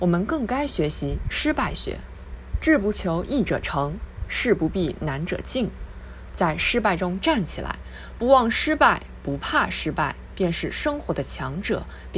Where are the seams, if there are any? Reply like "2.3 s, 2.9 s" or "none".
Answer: 6.3 s